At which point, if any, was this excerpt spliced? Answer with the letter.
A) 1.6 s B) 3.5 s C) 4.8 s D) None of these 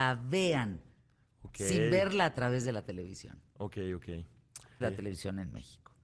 C